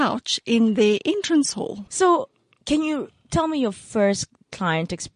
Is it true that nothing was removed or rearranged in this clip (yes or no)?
no